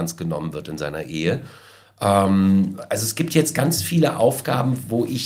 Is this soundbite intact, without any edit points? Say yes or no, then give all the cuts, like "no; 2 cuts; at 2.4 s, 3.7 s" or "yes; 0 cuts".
yes; 0 cuts